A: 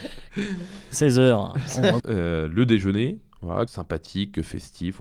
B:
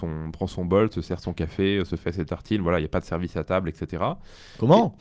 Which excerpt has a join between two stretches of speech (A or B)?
A